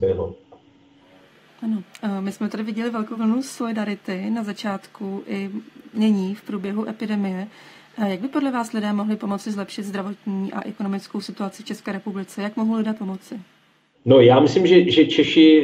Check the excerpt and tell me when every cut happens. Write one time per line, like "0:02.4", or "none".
none